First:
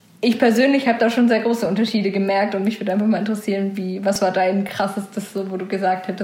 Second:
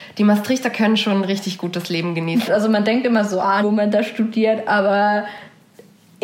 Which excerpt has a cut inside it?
second; 2 cuts; at 2.5 s, 3.6 s

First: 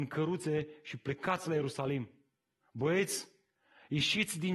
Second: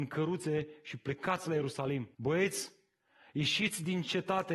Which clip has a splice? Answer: second; 1 cut; at 2.1 s

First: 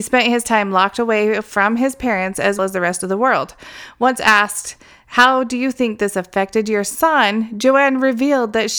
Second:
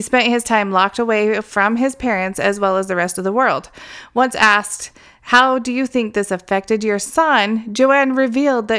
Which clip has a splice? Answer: first; 1 cut; at 2.6 s

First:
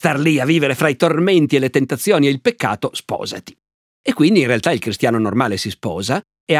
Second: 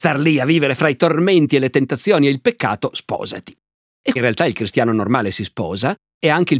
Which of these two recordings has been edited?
second; 1 cut; at 4.2 s

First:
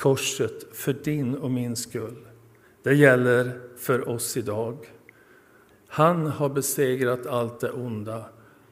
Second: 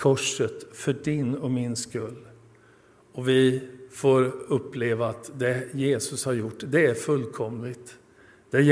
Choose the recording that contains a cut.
first; 2 cuts; at 2.6 s, 5.7 s

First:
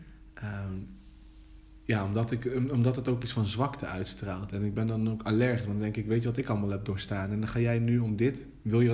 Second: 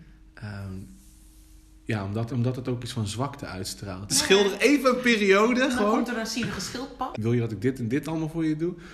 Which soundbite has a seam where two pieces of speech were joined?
second; 3 cuts; at 2.3 s, 4.1 s, 7.1 s

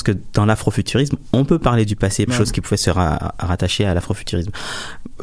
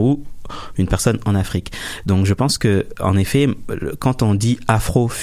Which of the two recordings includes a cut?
first; 1 cut; at 2.3 s

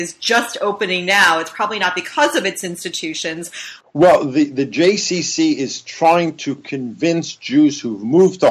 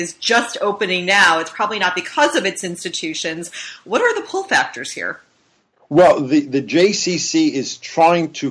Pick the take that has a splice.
first; 1 cut; at 3.8 s

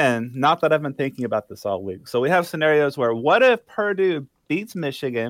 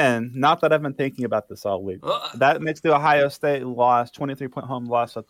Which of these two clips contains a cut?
second; 1 cut; at 2.0 s

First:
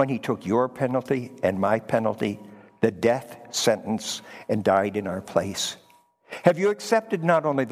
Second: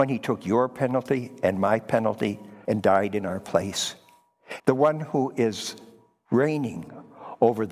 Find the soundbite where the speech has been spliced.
second; 2 cuts; at 2.6 s, 4.6 s

